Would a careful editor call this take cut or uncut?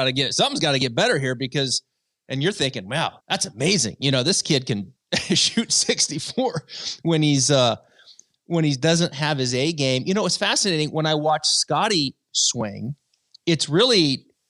cut